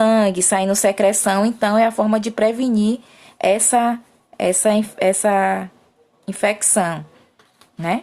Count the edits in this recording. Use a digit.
0